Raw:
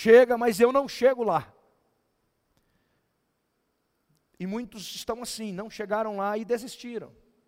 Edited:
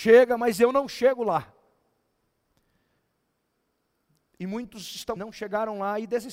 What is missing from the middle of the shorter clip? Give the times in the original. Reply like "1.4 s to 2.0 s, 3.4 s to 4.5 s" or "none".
5.2 s to 5.5 s